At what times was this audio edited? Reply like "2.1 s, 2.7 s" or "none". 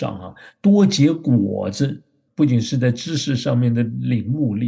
2.3 s

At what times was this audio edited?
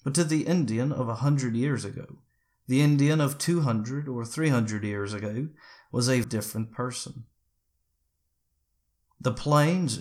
6.2 s

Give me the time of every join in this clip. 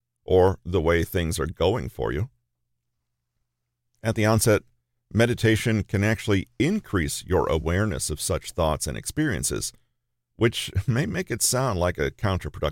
none

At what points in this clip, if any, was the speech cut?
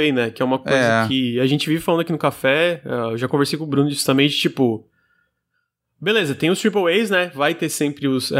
none

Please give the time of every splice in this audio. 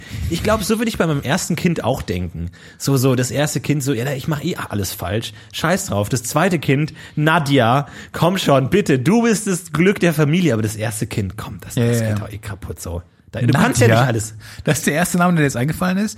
none

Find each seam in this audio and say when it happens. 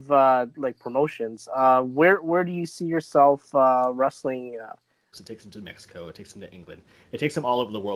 5.1 s

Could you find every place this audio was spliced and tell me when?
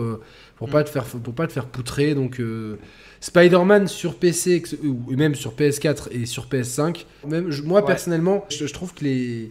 7.2 s, 8.5 s

